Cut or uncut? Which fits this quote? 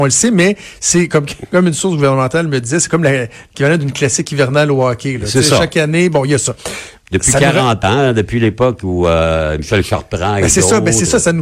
uncut